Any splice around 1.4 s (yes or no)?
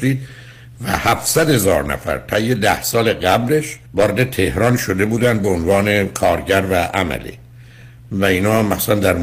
no